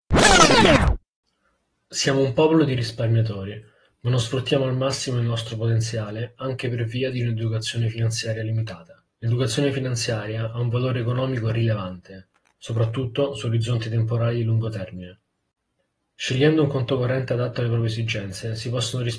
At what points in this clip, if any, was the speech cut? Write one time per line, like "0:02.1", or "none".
0:09.1